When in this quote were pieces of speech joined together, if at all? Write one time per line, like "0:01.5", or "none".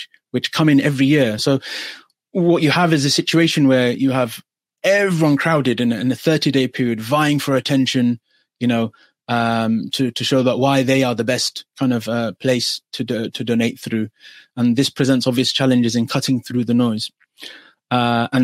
0:01.4